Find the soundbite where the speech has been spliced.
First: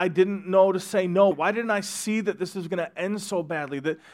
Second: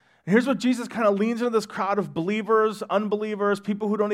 first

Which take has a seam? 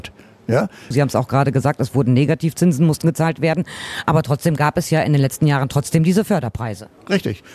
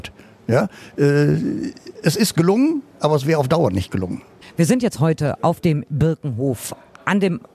first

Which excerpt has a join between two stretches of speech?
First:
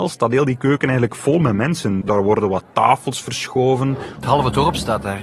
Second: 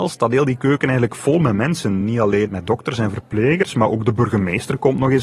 first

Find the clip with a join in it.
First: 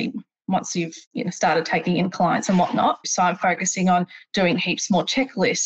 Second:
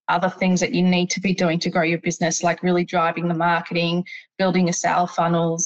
first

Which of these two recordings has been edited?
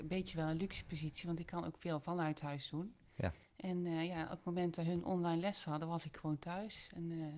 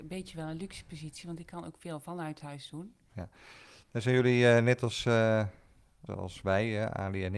second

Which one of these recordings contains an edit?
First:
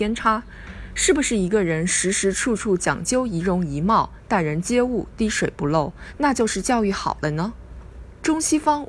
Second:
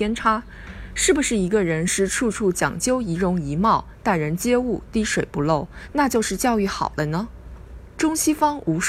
second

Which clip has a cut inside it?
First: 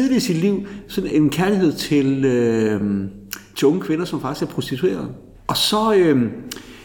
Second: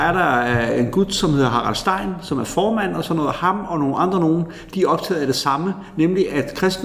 first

